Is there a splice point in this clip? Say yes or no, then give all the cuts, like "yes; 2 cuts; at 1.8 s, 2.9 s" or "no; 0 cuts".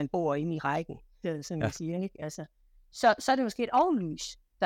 no; 0 cuts